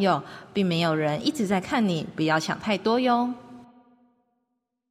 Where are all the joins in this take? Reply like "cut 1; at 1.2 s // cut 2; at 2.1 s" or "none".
none